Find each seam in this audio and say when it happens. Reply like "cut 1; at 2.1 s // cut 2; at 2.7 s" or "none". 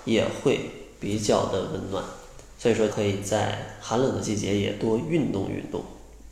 cut 1; at 2.9 s